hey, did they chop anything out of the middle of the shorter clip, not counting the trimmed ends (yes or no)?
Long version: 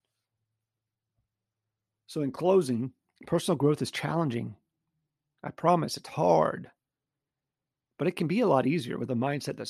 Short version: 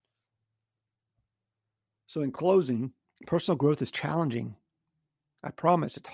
no